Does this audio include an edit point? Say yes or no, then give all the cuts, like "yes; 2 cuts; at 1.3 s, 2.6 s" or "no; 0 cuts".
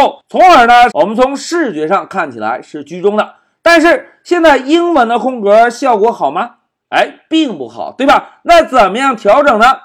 yes; 1 cut; at 0.9 s